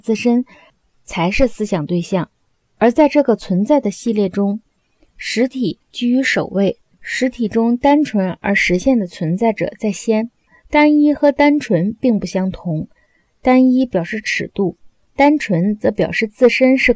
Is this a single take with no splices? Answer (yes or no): yes